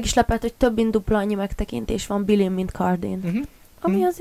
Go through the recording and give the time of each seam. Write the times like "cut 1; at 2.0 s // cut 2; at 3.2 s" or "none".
none